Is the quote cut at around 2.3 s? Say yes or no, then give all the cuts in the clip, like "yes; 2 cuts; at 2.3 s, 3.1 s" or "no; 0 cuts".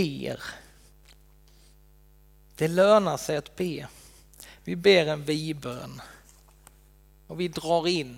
no; 1 cut; at 4.6 s